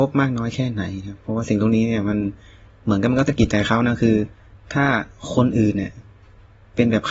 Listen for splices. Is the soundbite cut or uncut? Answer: uncut